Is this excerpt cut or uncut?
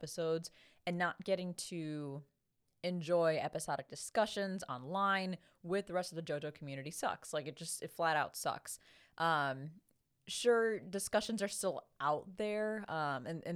uncut